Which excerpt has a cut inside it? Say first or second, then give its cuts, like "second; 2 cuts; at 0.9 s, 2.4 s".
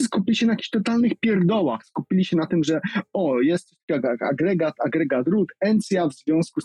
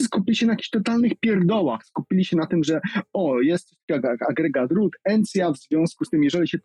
second; 1 cut; at 4.2 s